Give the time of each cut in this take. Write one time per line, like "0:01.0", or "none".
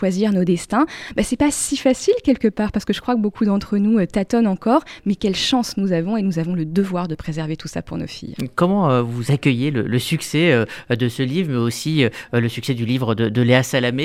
none